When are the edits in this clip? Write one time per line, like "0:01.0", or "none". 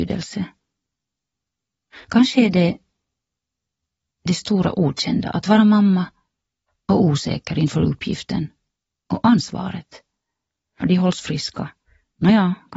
0:10.8